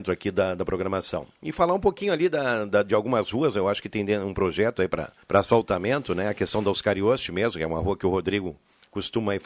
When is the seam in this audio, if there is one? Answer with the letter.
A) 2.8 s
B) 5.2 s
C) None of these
B